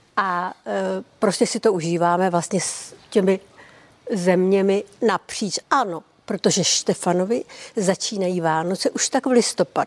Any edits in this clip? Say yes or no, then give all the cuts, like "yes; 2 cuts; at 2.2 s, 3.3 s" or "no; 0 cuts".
yes; 2 cuts; at 3.0 s, 5.6 s